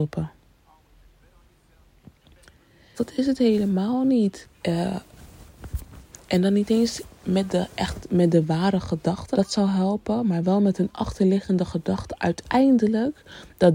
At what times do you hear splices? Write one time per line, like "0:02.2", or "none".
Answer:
0:02.9
0:04.4
0:09.3